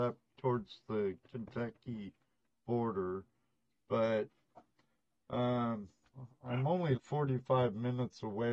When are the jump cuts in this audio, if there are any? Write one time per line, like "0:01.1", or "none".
0:07.0